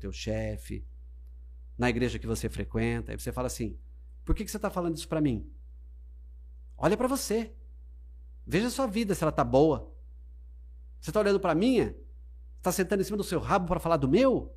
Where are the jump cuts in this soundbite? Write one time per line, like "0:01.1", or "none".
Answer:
none

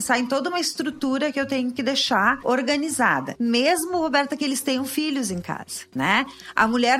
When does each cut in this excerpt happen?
0:03.4

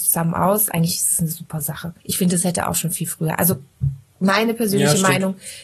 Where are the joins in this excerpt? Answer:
0:02.0

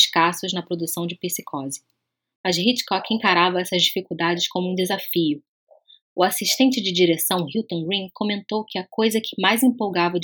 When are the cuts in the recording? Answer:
none

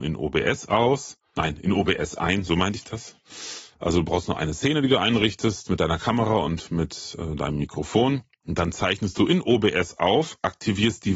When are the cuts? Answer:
none

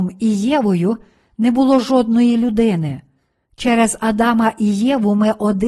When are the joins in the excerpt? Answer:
0:03.5

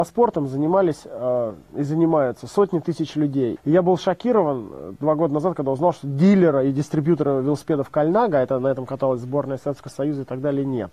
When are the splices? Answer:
0:03.6

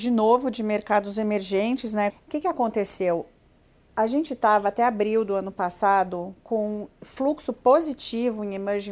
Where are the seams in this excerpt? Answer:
0:02.1

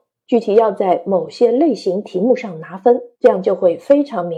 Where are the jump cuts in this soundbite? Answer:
0:03.1

